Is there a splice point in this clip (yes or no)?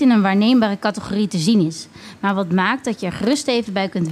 no